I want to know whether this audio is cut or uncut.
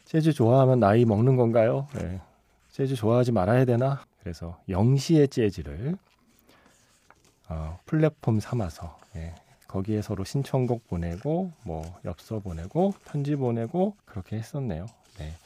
cut